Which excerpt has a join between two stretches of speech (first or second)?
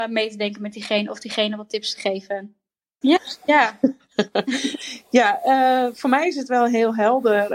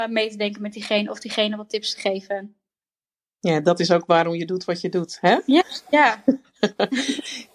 first